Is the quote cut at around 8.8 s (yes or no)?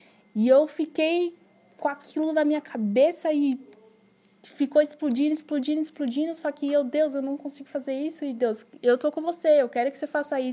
no